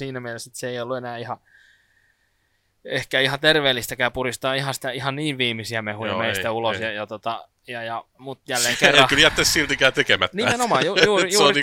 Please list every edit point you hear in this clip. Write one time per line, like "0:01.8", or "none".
0:08.1

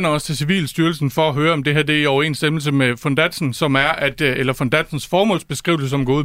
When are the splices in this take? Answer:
none

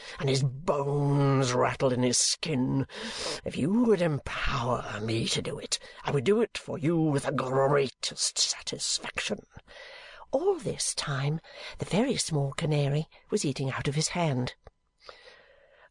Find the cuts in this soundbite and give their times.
0:03.4

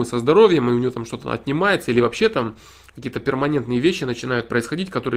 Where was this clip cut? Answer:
none

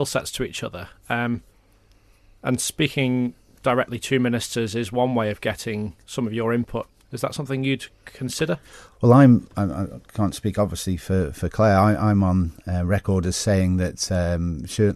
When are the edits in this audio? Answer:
0:07.0

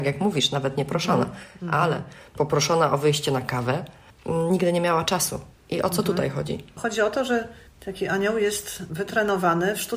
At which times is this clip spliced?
none

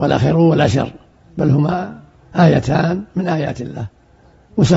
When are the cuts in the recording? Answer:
none

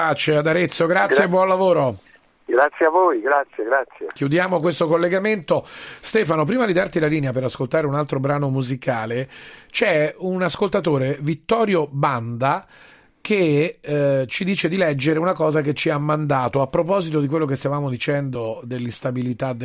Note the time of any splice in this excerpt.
none

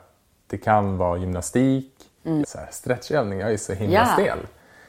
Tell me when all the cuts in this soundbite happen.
0:02.4

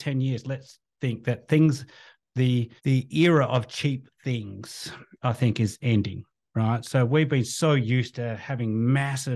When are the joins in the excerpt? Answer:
0:02.8

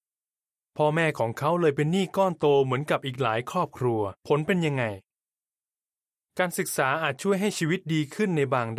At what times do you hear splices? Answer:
0:04.2

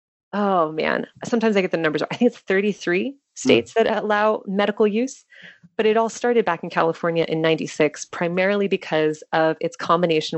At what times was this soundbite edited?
none

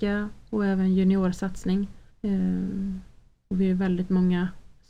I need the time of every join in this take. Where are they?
0:02.1

